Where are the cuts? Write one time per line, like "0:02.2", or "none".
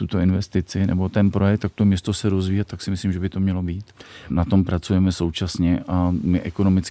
0:04.3